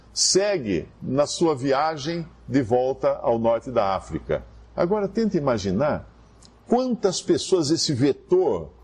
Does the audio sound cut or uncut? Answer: cut